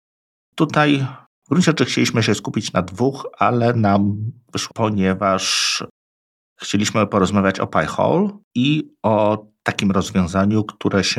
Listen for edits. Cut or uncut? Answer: cut